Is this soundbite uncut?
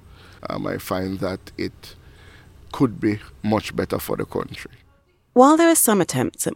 yes; 0 cuts

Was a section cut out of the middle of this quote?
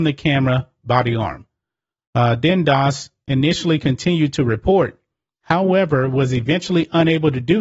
no; 0 cuts

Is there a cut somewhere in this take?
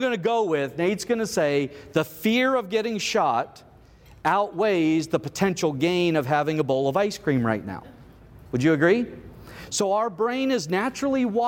no; 0 cuts

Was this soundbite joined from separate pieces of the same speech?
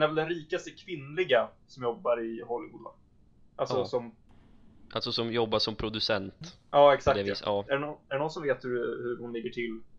yes; 1 cut; at 7.7 s

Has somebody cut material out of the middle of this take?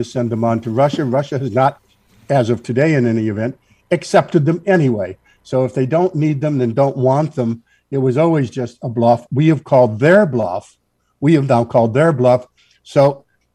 no; 0 cuts

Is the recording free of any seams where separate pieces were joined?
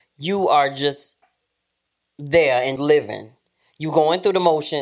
no; 1 cut; at 2.8 s

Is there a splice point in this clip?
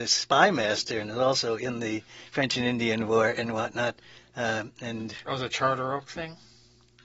no; 0 cuts

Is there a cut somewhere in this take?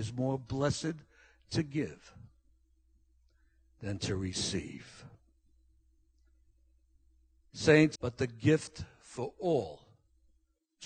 yes; 1 cut; at 7.9 s

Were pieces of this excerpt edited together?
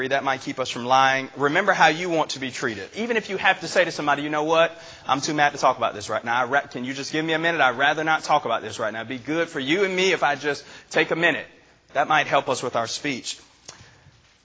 yes; 1 cut; at 2.9 s

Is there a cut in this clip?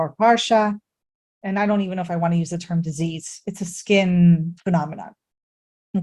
yes; 1 cut; at 1.3 s

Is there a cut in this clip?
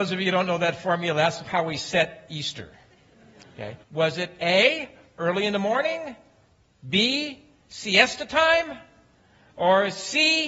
yes; 1 cut; at 3.8 s

